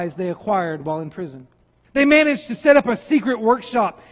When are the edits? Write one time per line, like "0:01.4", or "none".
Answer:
0:01.8

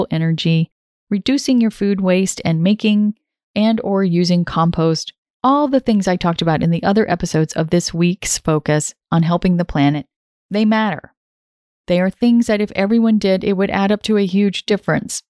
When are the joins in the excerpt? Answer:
0:05.3

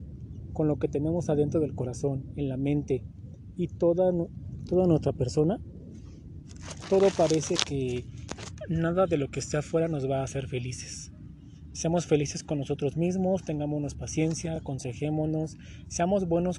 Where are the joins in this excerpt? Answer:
none

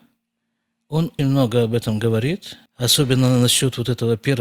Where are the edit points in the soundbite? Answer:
0:01.2
0:02.7

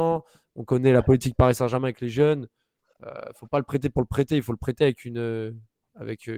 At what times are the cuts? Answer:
none

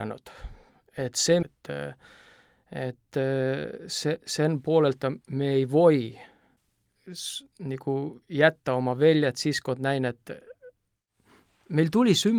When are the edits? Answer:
0:01.4
0:05.2

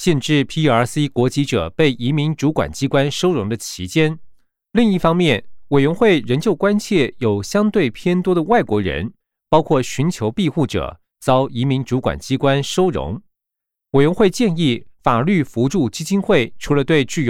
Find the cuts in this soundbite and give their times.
none

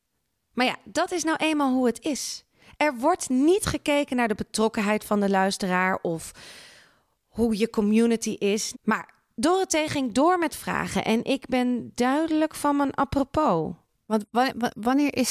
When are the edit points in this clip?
0:08.7

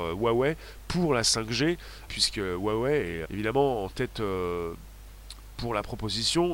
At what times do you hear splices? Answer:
0:02.1
0:03.2

